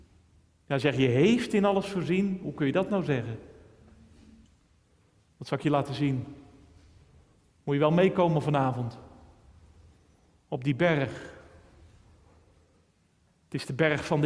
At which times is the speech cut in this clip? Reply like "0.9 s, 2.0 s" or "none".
none